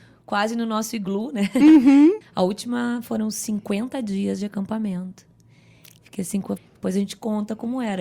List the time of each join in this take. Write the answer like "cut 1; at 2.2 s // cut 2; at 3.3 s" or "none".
cut 1; at 2.2 s // cut 2; at 6.6 s